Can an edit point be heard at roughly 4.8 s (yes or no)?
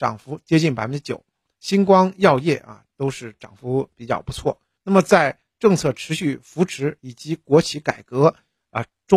yes